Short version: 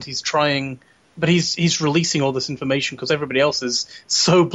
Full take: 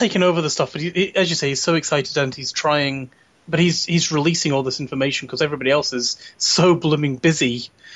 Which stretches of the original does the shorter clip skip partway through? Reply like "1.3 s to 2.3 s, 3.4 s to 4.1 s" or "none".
none